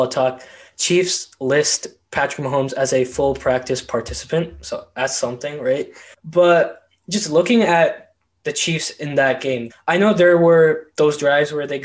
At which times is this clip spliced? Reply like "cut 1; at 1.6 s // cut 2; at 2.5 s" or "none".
cut 1; at 6.1 s // cut 2; at 9.7 s